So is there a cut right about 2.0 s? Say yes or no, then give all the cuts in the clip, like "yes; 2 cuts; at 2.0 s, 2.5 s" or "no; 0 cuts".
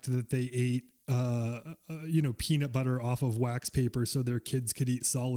no; 0 cuts